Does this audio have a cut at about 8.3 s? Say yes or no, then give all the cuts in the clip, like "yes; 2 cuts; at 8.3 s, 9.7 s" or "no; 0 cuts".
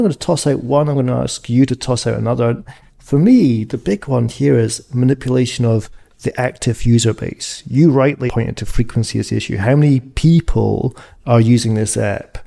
yes; 1 cut; at 8.3 s